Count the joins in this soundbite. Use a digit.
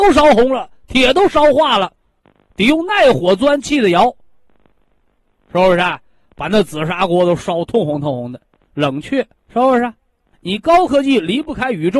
1